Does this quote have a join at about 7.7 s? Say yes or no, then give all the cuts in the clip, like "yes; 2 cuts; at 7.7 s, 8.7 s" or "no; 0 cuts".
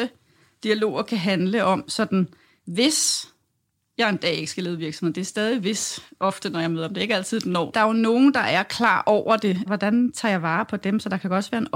yes; 2 cuts; at 7.7 s, 9.7 s